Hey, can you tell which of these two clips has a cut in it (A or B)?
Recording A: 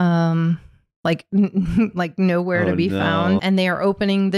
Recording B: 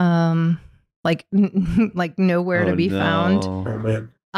A